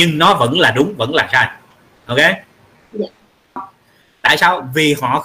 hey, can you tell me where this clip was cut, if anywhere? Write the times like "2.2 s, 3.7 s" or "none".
3.6 s